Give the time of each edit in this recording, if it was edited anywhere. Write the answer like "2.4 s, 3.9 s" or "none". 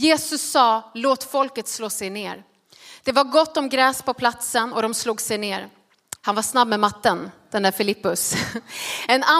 6.2 s